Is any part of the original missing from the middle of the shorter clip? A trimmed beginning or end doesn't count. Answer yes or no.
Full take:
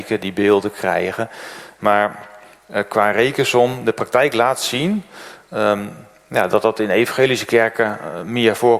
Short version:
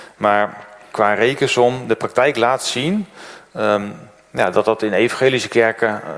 yes